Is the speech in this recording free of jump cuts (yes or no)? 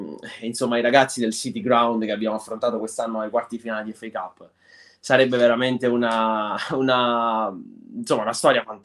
yes